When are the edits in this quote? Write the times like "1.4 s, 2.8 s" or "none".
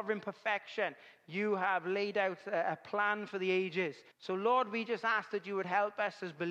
4.1 s